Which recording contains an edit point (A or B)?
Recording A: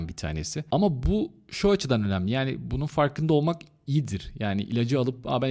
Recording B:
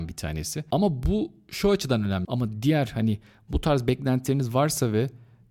B